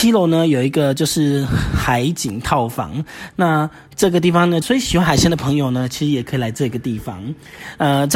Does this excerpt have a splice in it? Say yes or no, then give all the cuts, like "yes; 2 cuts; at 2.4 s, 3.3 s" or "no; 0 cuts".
yes; 2 cuts; at 3.3 s, 4.6 s